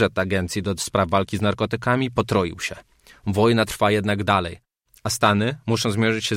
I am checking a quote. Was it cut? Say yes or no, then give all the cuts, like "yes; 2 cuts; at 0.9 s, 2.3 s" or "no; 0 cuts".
no; 0 cuts